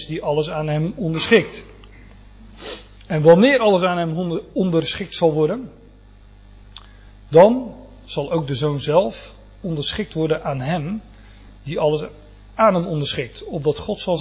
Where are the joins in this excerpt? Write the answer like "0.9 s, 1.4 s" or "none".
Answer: 11.6 s